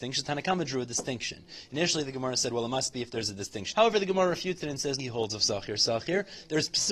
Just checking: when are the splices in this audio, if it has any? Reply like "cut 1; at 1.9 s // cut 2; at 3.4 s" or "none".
cut 1; at 3.7 s // cut 2; at 5.0 s